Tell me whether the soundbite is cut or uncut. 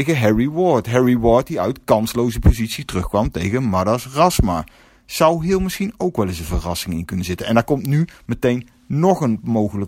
uncut